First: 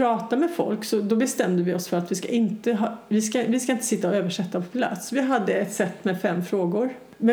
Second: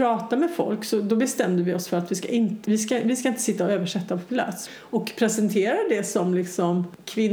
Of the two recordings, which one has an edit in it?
second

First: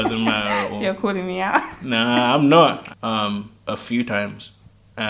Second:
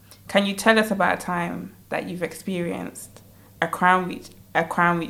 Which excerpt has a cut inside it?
first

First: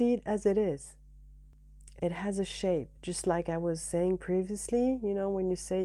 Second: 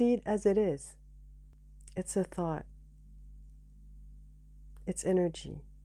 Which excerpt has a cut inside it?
first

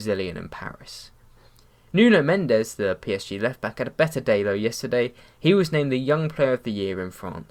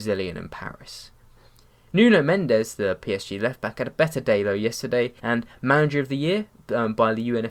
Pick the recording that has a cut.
second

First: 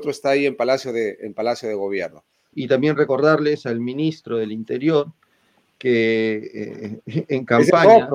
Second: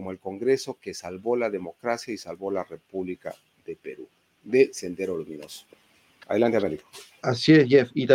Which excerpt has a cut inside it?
first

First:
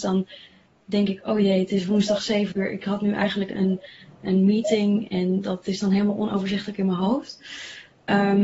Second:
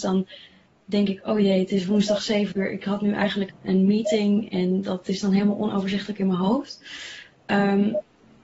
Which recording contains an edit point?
second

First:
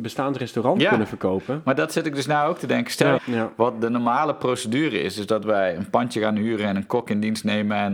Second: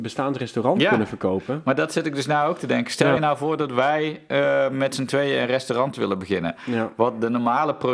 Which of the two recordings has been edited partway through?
first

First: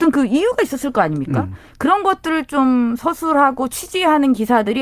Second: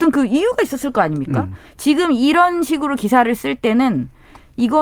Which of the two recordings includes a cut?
second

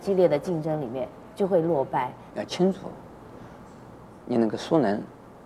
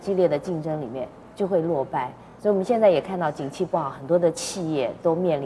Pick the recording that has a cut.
first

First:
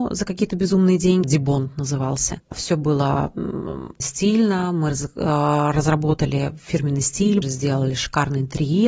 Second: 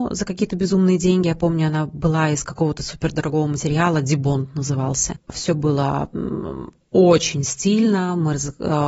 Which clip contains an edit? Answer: first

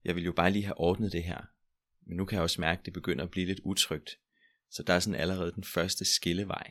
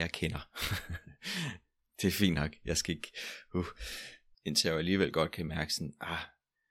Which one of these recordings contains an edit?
second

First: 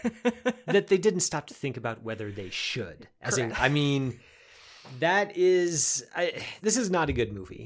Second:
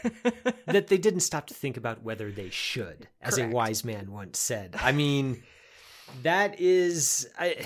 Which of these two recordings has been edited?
first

